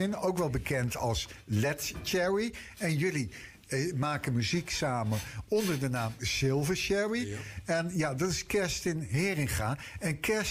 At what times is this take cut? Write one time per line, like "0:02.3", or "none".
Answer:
none